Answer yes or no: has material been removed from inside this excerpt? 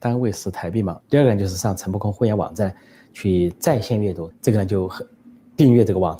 yes